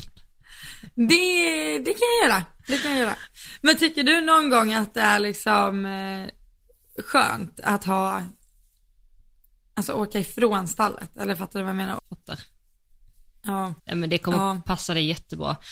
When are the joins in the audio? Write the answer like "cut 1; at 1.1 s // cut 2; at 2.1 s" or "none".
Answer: cut 1; at 12.0 s // cut 2; at 13.8 s